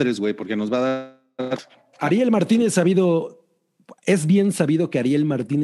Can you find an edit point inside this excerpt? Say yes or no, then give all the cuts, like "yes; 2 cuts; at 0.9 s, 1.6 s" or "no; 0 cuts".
yes; 1 cut; at 1.9 s